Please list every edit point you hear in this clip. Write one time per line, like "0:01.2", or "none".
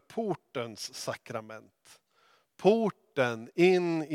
none